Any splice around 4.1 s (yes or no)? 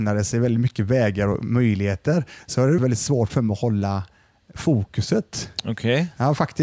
no